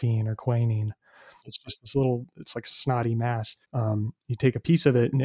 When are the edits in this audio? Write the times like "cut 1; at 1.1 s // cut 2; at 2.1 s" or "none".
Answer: cut 1; at 1.4 s // cut 2; at 3.6 s